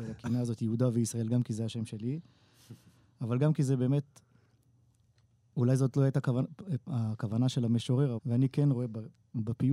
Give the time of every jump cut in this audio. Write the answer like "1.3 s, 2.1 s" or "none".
8.2 s